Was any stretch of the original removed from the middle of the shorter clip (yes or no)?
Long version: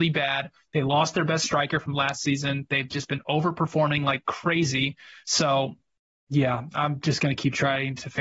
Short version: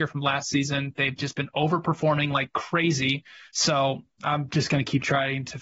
yes